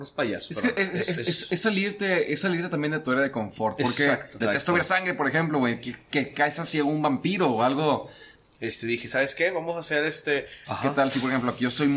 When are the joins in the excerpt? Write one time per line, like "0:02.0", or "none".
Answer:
0:04.4
0:08.6
0:10.6